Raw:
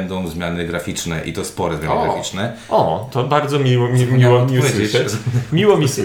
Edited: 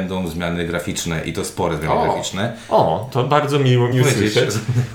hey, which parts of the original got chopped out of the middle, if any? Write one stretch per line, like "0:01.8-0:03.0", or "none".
0:03.9-0:04.5